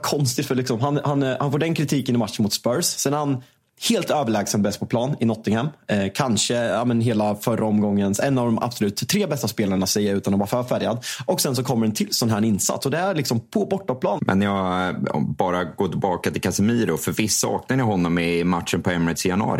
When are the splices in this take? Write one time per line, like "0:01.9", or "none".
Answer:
0:14.2